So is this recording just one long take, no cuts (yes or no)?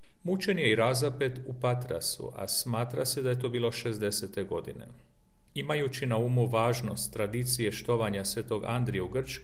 yes